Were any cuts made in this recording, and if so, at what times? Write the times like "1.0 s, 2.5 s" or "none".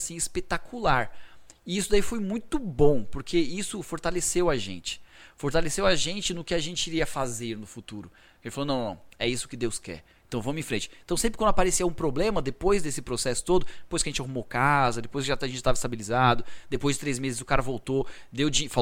none